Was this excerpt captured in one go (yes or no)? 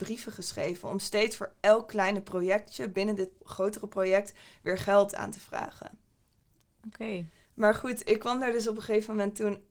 yes